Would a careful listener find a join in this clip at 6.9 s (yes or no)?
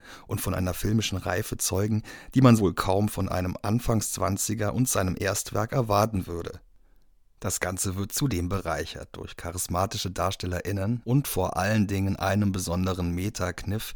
no